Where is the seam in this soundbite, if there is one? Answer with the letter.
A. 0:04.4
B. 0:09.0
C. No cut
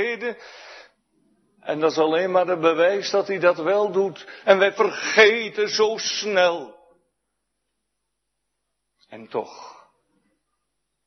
A